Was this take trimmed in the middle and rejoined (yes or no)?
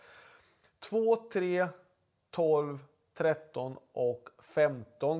no